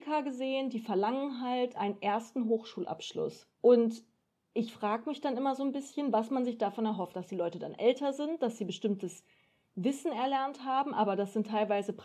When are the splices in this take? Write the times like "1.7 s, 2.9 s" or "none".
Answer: 3.5 s

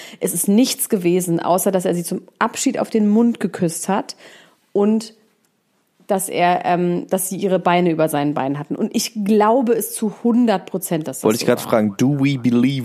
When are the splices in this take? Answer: none

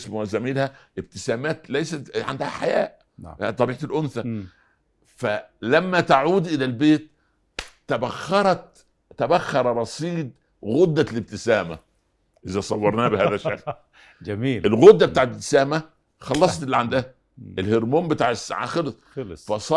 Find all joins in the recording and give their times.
none

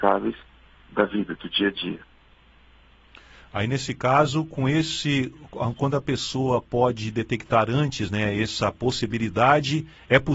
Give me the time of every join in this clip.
none

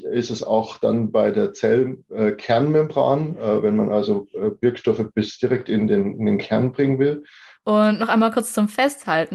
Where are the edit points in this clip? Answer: 7.5 s

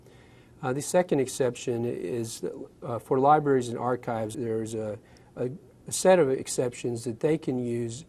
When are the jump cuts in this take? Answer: 4.3 s

